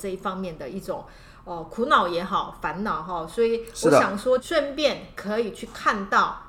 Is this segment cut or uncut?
cut